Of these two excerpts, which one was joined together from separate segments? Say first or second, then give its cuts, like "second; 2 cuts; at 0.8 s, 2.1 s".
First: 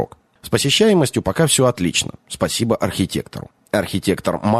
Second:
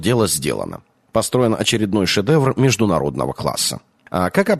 first; 1 cut; at 3.6 s